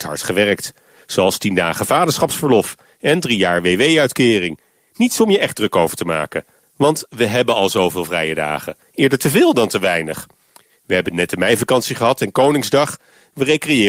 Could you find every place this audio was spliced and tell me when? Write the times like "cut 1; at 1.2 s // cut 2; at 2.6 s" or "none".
cut 1; at 6.6 s